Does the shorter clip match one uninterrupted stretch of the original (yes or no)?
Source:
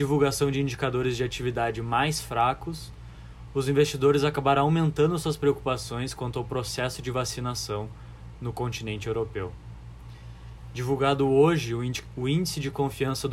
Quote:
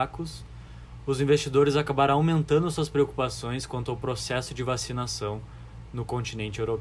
yes